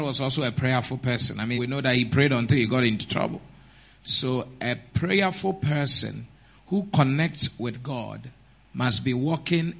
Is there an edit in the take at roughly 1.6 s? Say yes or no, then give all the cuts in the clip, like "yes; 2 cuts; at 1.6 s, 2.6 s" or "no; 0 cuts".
yes; 1 cut; at 1.6 s